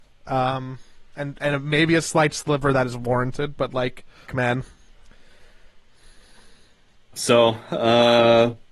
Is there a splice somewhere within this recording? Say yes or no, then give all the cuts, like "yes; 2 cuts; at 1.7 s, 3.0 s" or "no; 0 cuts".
yes; 2 cuts; at 4.3 s, 7.1 s